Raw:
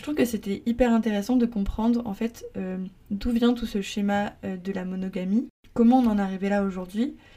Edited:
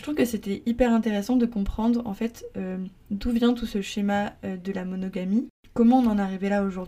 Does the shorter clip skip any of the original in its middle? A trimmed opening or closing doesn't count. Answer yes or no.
no